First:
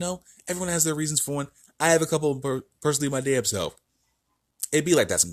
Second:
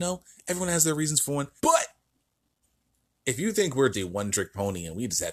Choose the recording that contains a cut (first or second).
second